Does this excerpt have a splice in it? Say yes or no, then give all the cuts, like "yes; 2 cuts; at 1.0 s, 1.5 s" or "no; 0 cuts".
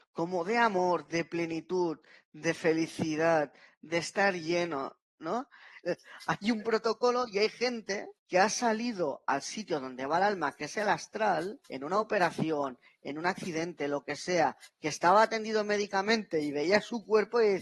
yes; 3 cuts; at 5.8 s, 8.2 s, 11.6 s